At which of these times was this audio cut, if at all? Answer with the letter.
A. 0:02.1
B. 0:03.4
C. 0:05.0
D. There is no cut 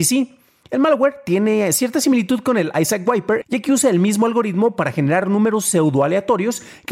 B